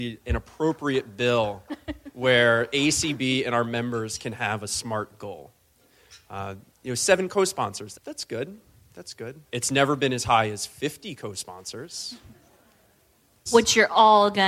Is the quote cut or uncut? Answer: cut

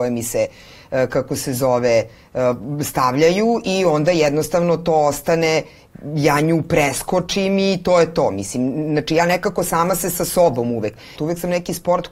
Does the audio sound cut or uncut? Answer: cut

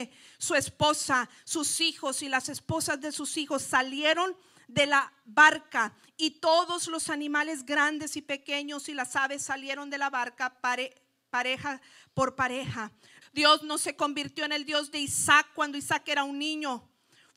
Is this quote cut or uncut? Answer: cut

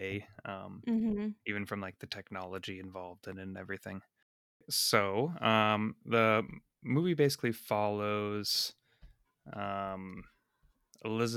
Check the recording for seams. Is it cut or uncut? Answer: uncut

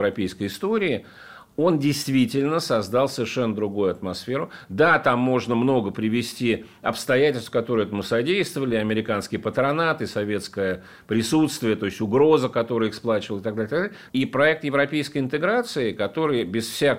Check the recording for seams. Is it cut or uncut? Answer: cut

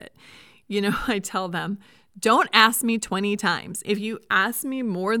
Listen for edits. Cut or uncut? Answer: uncut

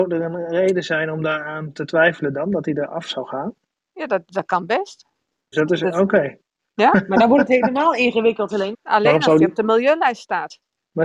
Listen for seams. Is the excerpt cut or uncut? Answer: cut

